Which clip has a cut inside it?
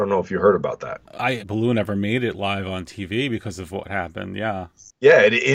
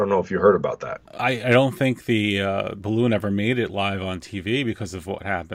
first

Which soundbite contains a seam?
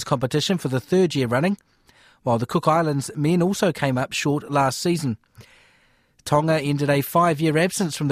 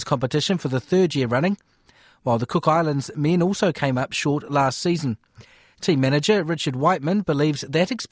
second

